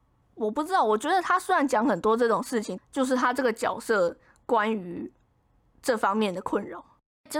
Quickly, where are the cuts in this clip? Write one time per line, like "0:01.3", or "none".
0:02.8